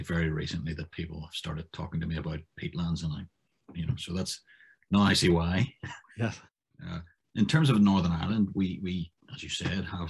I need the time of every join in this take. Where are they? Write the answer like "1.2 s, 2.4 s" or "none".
none